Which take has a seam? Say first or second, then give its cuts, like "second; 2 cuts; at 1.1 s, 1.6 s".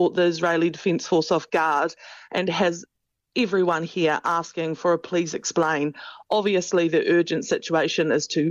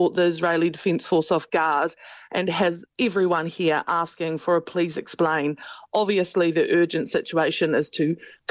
second; 1 cut; at 2.9 s